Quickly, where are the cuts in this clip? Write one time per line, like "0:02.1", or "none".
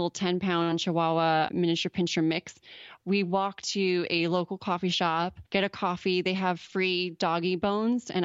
0:05.5